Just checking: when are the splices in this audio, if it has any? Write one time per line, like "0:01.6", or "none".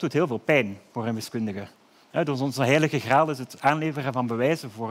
none